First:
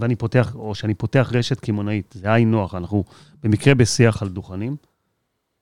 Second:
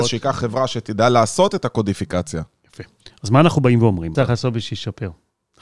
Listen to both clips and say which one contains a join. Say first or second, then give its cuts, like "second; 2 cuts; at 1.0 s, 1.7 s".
second; 1 cut; at 4.1 s